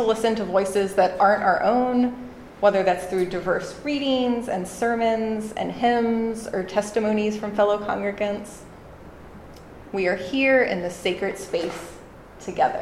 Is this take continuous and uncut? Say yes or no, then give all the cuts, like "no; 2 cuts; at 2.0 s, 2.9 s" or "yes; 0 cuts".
no; 1 cut; at 9.8 s